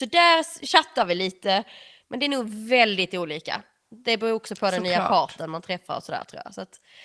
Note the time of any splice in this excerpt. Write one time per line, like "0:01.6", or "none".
0:02.0